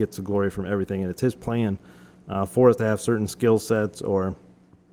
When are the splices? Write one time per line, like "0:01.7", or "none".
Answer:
none